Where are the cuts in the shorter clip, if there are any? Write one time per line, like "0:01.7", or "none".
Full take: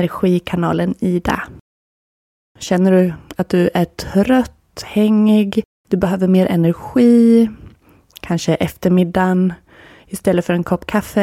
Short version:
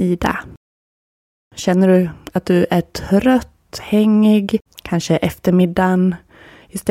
0:04.7